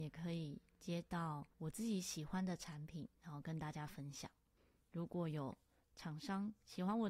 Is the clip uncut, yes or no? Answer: yes